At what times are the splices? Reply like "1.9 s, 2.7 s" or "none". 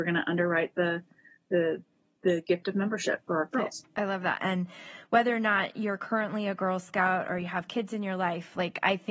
4.4 s